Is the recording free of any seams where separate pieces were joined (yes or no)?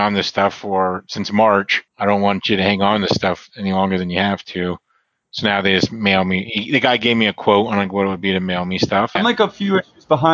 no